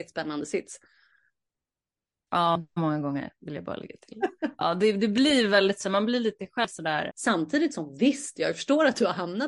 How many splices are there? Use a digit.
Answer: 2